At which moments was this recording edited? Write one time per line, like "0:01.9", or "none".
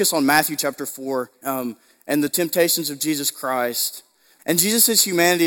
0:01.4
0:04.4